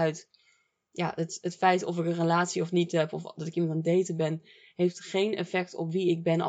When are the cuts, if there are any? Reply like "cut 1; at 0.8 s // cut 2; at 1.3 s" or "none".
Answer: none